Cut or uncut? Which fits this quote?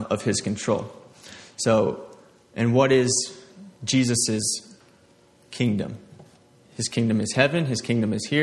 uncut